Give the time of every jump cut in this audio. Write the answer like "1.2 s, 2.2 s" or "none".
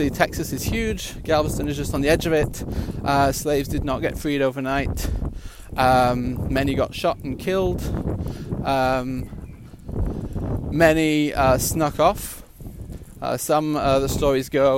none